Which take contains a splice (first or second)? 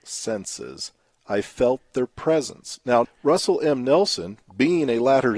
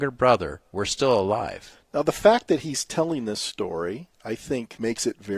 first